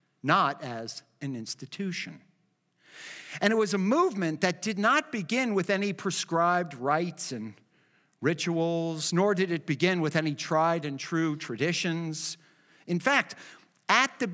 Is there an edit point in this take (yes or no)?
no